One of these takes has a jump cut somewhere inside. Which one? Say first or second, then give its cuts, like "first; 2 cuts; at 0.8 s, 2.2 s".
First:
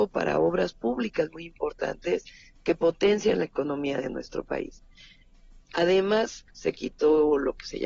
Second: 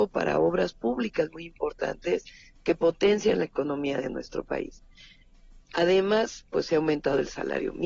first; 1 cut; at 6.5 s